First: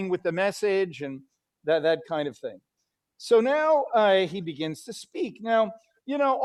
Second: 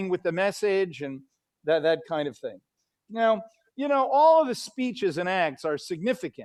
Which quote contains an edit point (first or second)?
second